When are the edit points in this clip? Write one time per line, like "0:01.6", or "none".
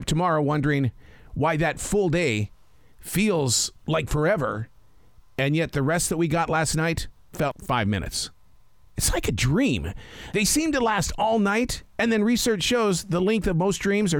0:07.5